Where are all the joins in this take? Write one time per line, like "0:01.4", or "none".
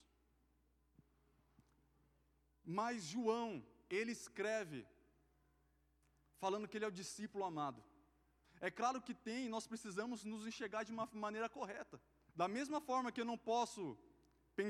0:08.4
0:12.3